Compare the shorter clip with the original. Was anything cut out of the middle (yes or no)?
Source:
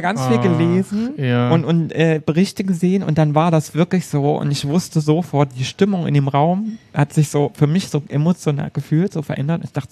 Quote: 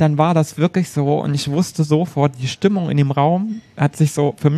no